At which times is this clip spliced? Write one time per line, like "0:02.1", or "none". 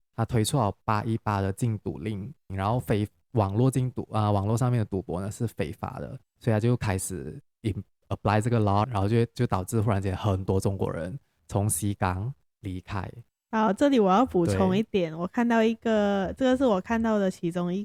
0:02.5
0:08.8